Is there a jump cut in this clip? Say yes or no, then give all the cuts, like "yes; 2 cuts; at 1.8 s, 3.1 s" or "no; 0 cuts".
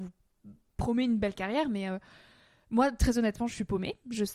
no; 0 cuts